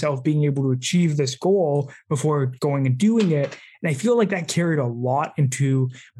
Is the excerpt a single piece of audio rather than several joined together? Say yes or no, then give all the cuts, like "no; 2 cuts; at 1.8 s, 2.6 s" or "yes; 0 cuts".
yes; 0 cuts